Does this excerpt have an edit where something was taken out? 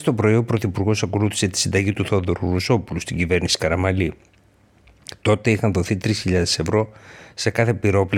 no; 0 cuts

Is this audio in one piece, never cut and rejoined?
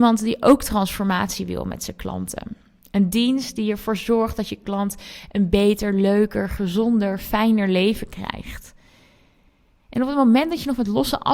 yes; 0 cuts

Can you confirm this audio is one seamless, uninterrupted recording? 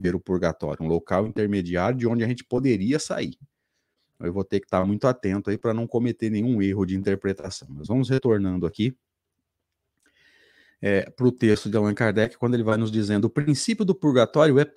yes; 0 cuts

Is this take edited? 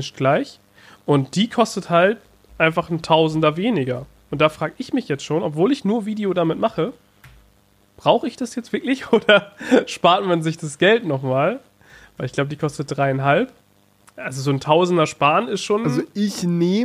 no; 0 cuts

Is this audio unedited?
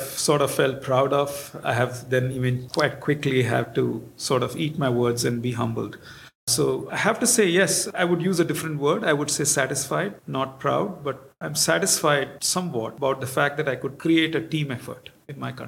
yes; 0 cuts

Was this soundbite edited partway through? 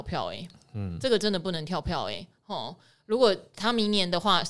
no; 0 cuts

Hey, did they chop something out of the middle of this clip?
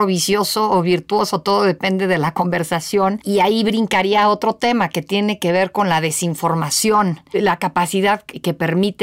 no; 0 cuts

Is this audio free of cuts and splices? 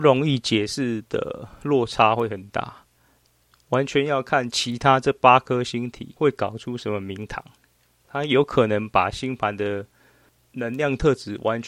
yes; 0 cuts

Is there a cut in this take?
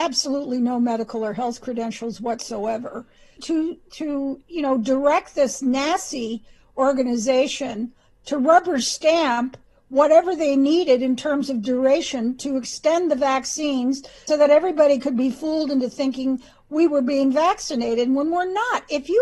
yes; 2 cuts; at 3.4 s, 14.3 s

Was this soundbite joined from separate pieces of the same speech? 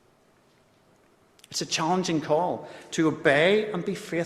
no; 0 cuts

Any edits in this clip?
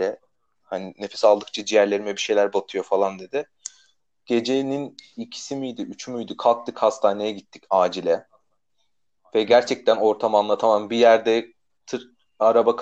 no; 0 cuts

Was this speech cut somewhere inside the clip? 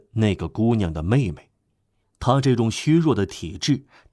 yes; 1 cut; at 2.0 s

